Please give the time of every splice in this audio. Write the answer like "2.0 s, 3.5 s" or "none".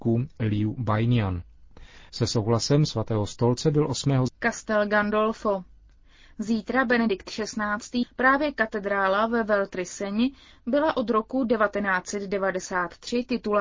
2.1 s, 4.3 s, 8.0 s